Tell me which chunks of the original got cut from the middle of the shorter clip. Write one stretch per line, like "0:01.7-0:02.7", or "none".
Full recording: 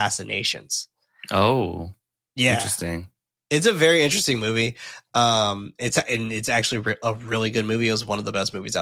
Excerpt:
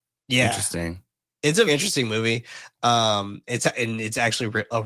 0:03.7-0:04.0